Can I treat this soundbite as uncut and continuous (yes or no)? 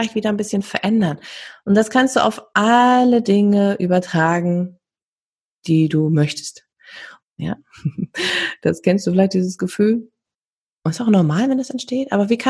no